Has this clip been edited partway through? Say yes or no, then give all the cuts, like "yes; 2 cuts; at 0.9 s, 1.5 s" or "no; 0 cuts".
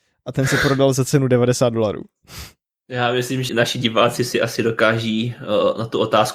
yes; 1 cut; at 3.5 s